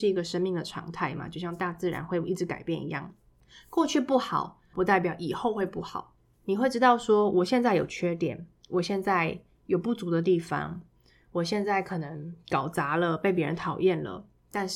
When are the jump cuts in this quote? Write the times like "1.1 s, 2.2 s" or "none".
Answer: 4.7 s

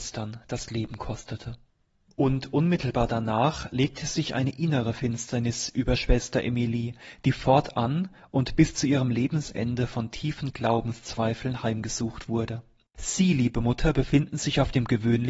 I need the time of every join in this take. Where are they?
12.9 s

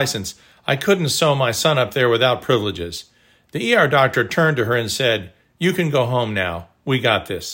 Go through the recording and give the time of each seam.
none

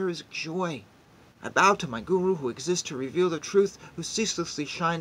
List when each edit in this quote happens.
1.2 s

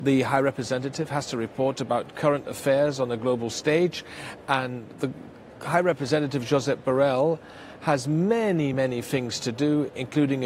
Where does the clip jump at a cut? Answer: none

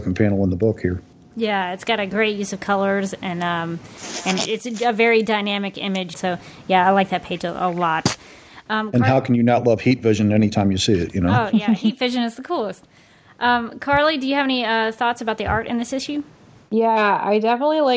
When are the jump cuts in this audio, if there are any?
6.1 s

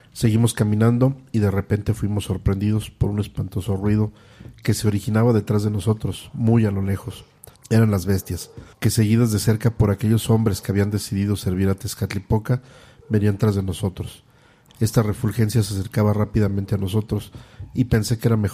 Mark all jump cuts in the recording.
7.5 s, 8.7 s, 14.7 s

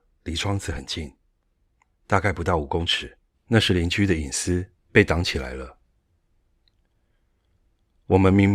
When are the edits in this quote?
1.9 s, 3.3 s, 4.8 s

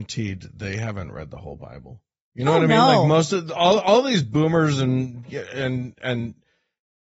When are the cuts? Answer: none

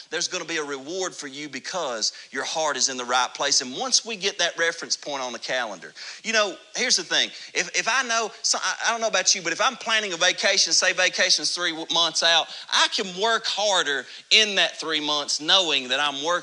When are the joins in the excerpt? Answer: none

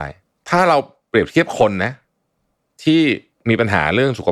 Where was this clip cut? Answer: none

